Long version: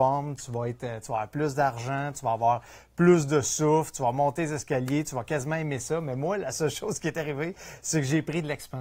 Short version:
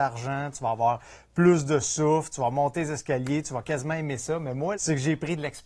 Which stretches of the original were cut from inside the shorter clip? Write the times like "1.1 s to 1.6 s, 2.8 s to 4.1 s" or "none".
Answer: 6.4 s to 7.8 s

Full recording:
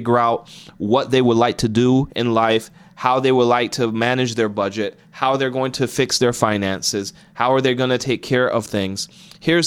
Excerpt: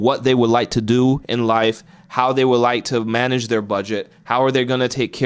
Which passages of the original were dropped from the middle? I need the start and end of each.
5.1 s to 7.3 s

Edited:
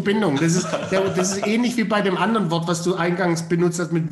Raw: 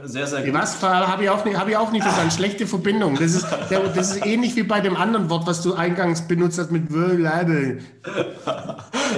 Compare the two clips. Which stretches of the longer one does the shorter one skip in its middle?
none

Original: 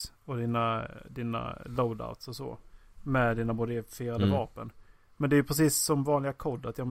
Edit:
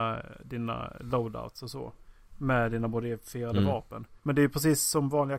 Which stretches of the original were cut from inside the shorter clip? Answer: 4.8 s to 5.1 s

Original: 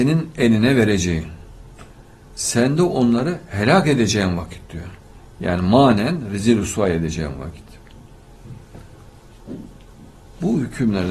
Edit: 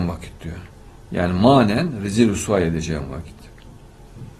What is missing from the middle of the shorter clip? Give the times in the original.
none

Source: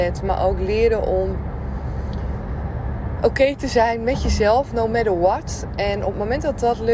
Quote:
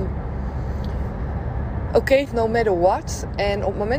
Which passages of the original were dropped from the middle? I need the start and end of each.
3.6 s to 4.7 s

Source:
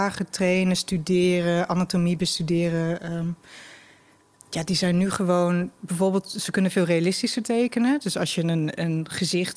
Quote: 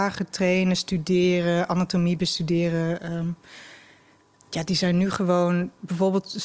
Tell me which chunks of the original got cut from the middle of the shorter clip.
none

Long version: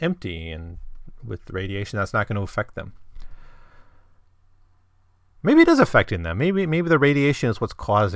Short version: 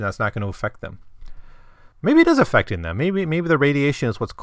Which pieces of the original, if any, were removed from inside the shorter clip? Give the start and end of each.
3.9 s to 5.3 s

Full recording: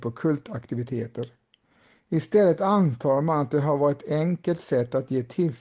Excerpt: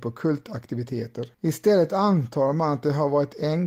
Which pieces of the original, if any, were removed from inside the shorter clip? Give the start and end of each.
1.3 s to 2.0 s

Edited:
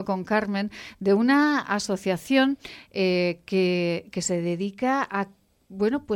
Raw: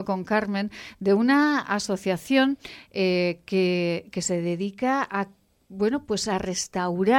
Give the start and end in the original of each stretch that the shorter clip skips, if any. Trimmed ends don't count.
none

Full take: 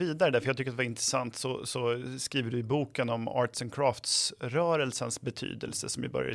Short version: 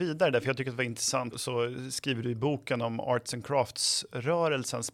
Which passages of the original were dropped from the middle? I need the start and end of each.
1.3 s to 1.6 s

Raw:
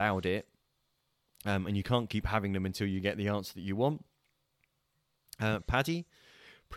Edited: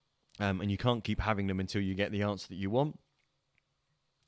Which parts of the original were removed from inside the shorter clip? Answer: none

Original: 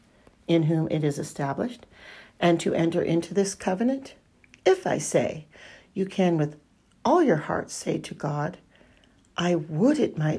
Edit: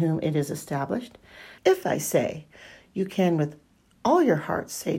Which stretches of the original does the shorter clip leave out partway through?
2.3 s to 4.6 s

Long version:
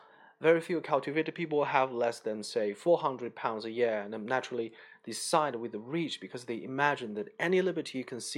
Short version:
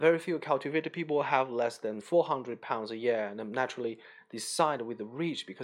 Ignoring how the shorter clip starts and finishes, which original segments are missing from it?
2.4 s to 2.7 s

